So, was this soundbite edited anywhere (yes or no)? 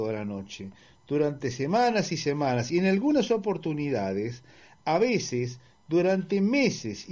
no